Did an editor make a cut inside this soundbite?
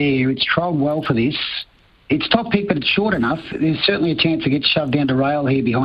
no; 0 cuts

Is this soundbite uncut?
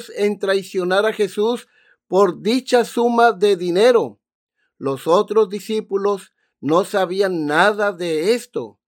yes; 0 cuts

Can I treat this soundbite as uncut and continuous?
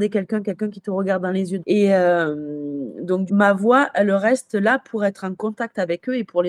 no; 2 cuts; at 1.6 s, 3.3 s

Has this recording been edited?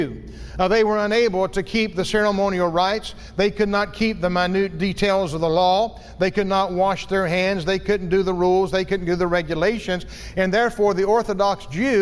no; 0 cuts

